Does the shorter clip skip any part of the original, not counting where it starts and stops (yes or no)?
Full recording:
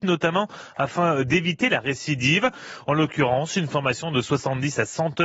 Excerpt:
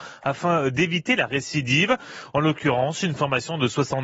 no